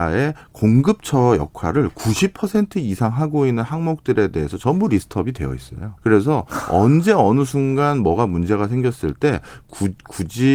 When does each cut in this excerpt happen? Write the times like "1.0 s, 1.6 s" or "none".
6.0 s